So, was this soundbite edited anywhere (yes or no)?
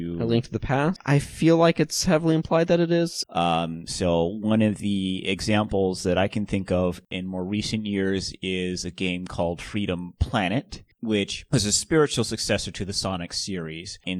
yes